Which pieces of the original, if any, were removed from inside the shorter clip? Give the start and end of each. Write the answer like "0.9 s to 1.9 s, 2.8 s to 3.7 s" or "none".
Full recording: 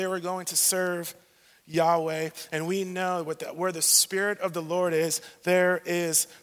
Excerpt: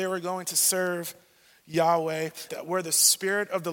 2.5 s to 3.4 s